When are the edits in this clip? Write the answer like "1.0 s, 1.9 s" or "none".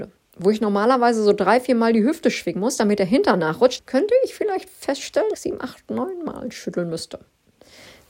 3.8 s, 5.3 s